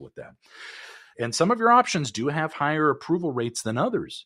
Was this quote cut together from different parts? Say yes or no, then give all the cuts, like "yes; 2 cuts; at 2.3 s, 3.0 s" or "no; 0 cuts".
yes; 1 cut; at 1.1 s